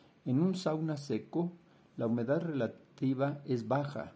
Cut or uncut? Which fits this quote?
uncut